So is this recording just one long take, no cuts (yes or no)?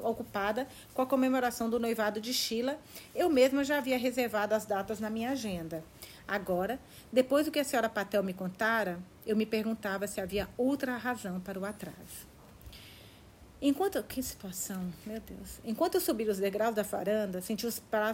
yes